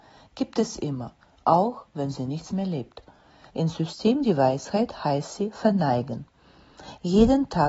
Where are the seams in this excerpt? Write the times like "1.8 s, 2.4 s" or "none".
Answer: 3.5 s